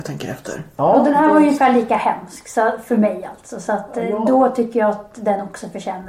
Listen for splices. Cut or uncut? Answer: uncut